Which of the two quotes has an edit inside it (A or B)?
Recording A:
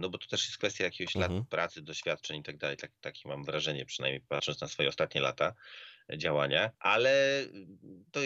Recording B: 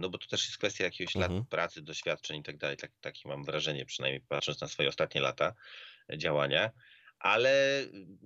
A